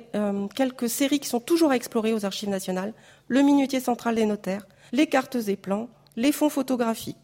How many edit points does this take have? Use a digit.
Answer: 1